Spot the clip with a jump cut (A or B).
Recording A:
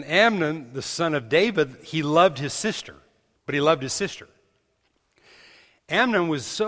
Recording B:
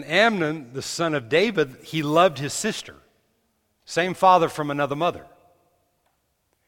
A